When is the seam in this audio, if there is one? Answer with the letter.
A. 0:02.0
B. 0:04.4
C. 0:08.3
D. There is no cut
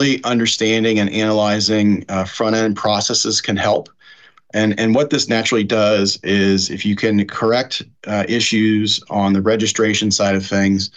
D